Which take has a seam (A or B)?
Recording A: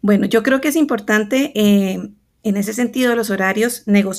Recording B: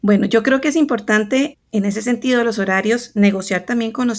B